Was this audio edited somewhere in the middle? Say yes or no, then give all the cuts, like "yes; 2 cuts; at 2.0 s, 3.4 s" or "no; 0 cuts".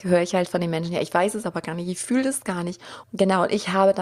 yes; 1 cut; at 3.0 s